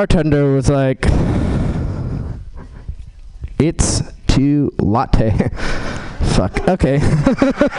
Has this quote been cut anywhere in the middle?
no; 0 cuts

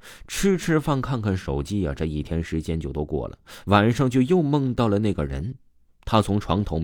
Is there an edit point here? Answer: no; 0 cuts

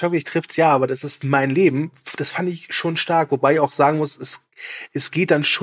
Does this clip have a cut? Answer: no; 0 cuts

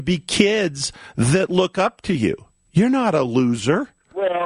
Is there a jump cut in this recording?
yes; 1 cut; at 2.7 s

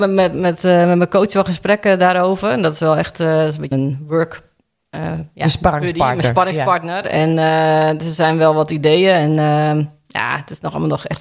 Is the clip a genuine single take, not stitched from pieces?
no; 1 cut; at 3.7 s

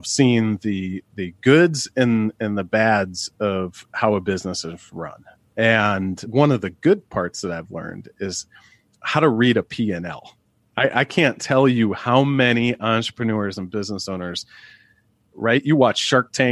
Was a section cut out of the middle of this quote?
yes; 1 cut; at 15.3 s

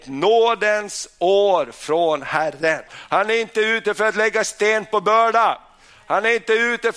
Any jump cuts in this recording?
yes; 1 cut; at 2.9 s

